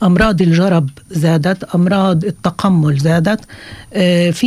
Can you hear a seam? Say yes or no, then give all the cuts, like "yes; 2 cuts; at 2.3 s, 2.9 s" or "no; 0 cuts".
no; 0 cuts